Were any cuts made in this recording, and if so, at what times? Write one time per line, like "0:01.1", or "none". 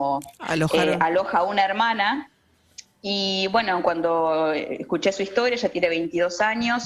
none